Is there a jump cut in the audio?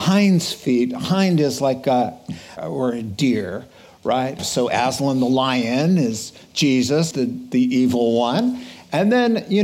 yes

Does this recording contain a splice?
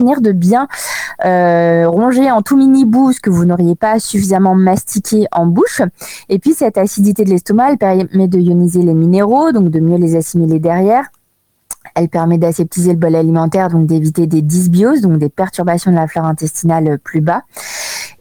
no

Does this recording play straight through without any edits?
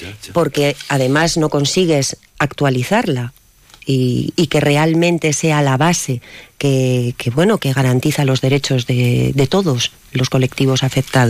yes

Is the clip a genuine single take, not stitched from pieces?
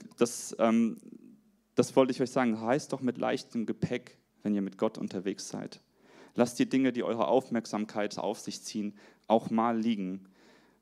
yes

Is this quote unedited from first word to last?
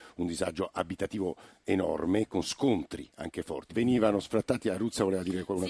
no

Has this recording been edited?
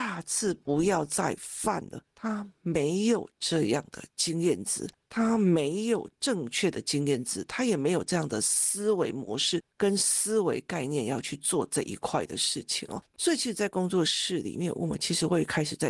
no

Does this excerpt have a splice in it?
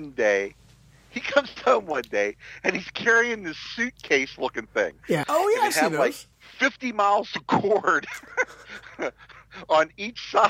yes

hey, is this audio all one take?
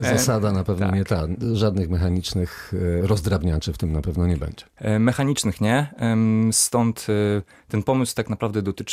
yes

